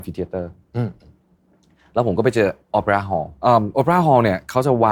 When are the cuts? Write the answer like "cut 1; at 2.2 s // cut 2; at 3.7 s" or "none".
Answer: cut 1; at 3.4 s

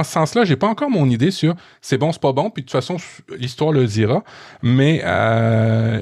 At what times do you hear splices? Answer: none

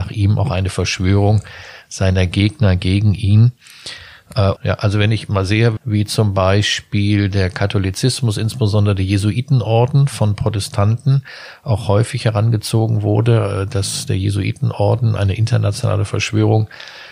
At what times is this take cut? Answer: cut 1; at 4.6 s // cut 2; at 5.8 s // cut 3; at 15.2 s

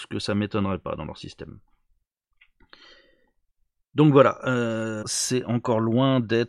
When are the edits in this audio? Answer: cut 1; at 5.0 s

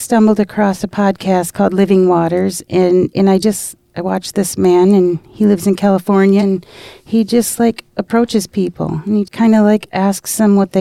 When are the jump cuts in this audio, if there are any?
cut 1; at 6.4 s // cut 2; at 9.2 s

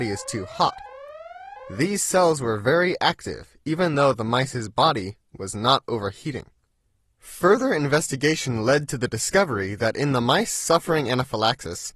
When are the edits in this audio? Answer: none

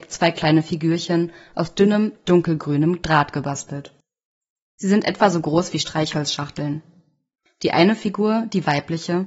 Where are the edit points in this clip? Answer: none

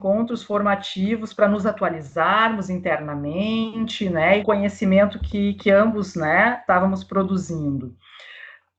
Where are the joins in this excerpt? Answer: cut 1; at 4.4 s

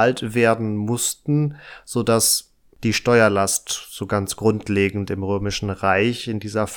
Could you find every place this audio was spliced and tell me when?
cut 1; at 2.7 s

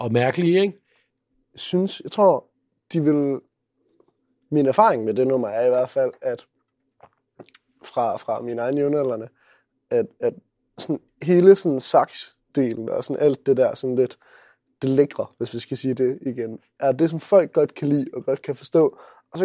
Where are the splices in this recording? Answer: cut 1; at 1.3 s

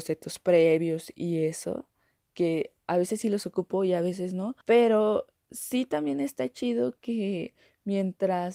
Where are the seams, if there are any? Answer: cut 1; at 4.6 s

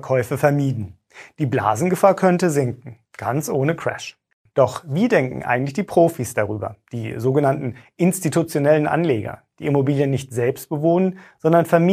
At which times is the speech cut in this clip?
cut 1; at 4.5 s

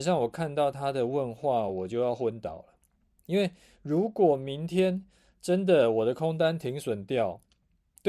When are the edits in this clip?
none

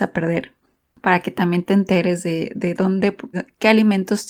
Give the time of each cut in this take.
cut 1; at 3.3 s

